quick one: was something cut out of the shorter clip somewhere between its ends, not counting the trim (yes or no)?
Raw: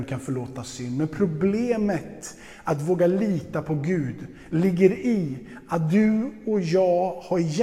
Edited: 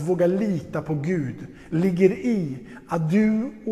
no